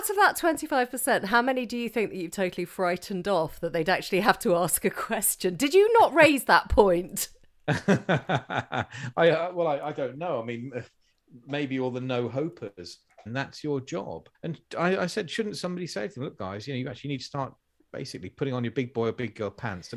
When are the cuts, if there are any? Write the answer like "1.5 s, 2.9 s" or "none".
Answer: 13.3 s, 14.3 s